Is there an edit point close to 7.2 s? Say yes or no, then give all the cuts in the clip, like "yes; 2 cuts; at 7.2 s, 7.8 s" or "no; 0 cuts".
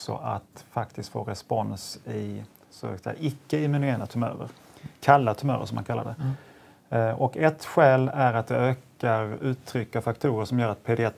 no; 0 cuts